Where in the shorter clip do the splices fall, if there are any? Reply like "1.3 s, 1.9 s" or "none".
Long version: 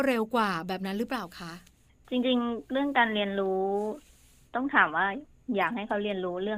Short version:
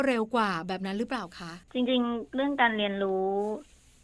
1.6 s